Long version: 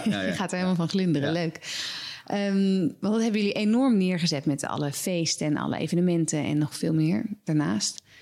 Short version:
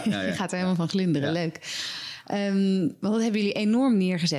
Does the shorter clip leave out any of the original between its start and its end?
no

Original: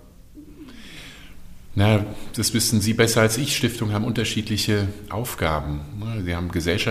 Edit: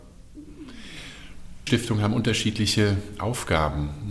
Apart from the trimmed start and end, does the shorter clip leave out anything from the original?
yes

